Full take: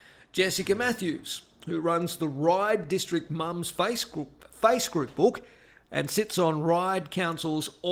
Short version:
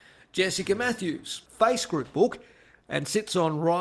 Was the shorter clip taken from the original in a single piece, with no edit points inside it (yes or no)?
no